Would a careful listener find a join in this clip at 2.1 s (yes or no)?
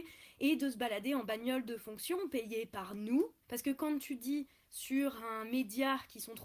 no